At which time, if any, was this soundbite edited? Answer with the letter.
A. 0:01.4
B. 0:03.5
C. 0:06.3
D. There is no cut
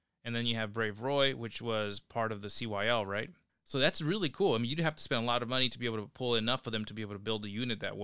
B